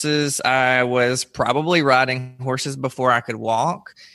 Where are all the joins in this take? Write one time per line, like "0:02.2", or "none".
none